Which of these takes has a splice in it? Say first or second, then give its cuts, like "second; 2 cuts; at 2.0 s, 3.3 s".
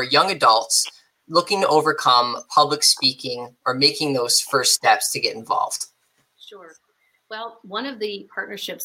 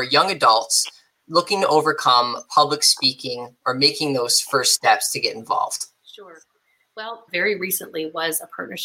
second; 2 cuts; at 6.0 s, 7.3 s